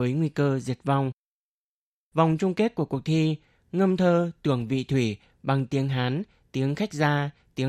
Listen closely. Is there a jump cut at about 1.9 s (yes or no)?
no